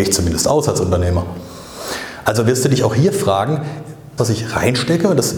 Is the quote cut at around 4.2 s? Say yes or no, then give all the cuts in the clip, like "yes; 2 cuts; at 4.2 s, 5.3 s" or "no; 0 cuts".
yes; 1 cut; at 4.2 s